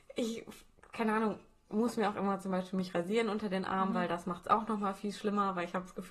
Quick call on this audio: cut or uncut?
uncut